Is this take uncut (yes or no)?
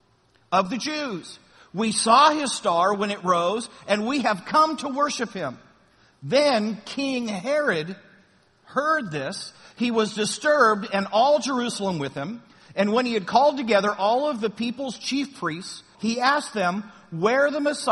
no